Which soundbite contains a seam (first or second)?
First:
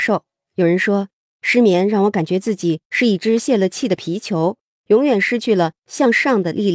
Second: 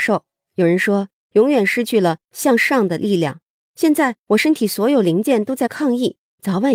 second